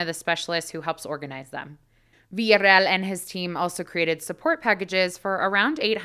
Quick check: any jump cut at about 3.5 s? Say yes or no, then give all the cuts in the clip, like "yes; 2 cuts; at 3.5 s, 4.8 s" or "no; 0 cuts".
no; 1 cut; at 2.1 s